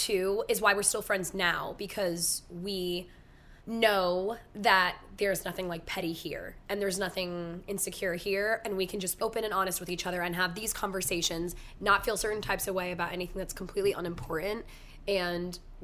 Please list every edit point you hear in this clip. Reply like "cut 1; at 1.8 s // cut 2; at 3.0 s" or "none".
cut 1; at 3.6 s // cut 2; at 9.2 s